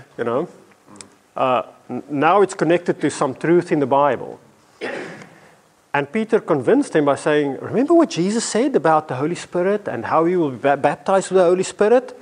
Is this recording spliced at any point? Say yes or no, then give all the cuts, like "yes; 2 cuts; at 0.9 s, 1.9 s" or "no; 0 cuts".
no; 0 cuts